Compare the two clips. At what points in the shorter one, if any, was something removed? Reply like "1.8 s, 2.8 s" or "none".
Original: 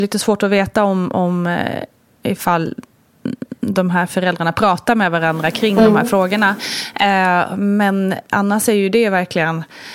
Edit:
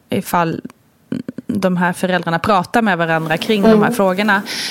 none

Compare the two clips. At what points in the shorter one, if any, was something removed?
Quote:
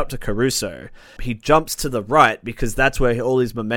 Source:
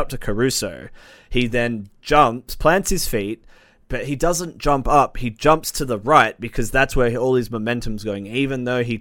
1.2 s

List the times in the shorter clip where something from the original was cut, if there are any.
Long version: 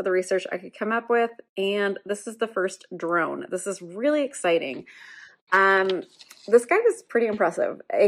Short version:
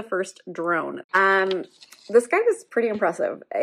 1.0 s

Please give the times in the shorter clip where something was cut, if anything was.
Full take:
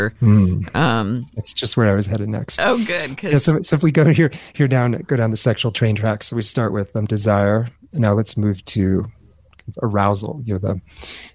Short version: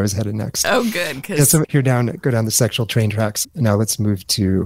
1.6 s, 3.4 s

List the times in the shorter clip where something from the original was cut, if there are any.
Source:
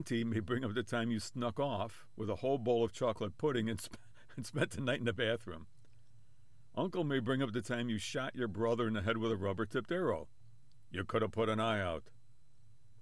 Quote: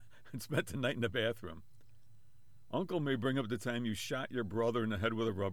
none

